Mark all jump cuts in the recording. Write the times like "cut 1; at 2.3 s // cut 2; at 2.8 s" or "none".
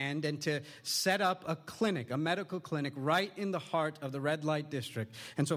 none